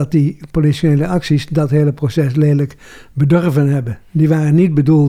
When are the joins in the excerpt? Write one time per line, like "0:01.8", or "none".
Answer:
none